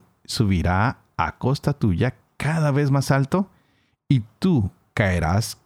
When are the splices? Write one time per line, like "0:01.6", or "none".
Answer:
none